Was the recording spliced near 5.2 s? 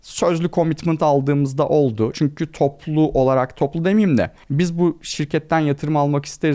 no; 1 cut; at 2.1 s

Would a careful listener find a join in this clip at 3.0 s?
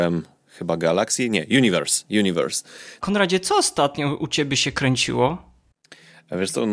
yes; 1 cut; at 3.0 s

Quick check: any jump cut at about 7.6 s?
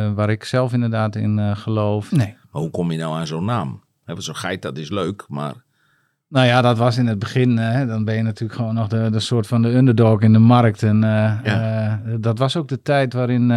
no; 1 cut; at 2.1 s

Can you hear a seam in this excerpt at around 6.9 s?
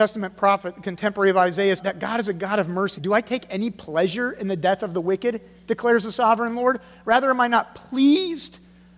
no; 2 cuts; at 1.8 s, 3.0 s

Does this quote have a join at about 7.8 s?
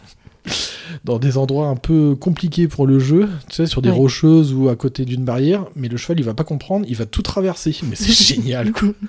yes; 2 cuts; at 3.7 s, 7.8 s

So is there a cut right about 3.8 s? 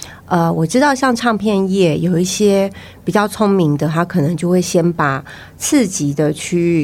no; 0 cuts

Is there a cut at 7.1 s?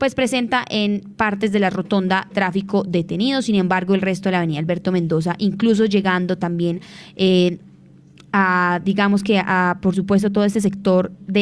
no; 0 cuts

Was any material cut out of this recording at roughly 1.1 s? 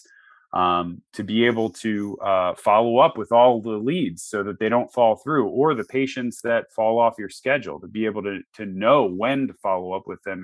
no; 0 cuts

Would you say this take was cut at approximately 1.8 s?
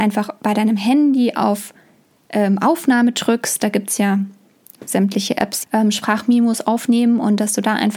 no; 1 cut; at 5.6 s

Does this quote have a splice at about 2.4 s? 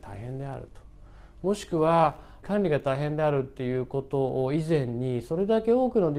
yes; 1 cut; at 2.4 s

